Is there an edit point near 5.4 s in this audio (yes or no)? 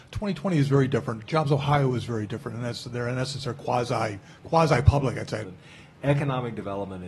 yes